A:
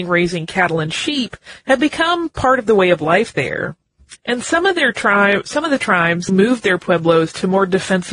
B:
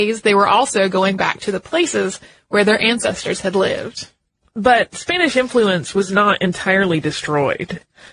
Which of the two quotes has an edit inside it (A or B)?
A